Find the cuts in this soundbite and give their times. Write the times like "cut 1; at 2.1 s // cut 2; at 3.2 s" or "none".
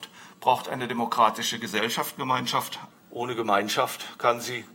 cut 1; at 2.9 s